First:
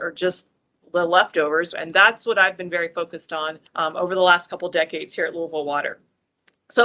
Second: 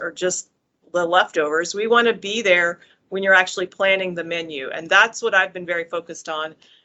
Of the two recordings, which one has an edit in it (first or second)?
first